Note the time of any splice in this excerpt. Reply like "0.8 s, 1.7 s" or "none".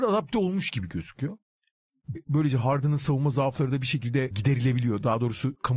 2.1 s